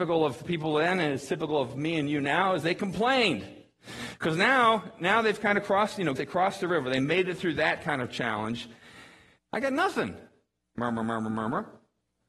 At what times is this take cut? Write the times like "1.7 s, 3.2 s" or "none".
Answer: 6.2 s, 9.4 s